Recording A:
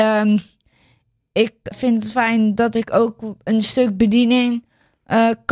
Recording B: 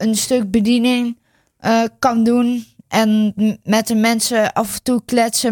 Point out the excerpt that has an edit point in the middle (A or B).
A